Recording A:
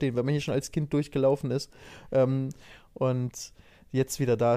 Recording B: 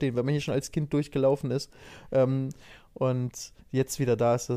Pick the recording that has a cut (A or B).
B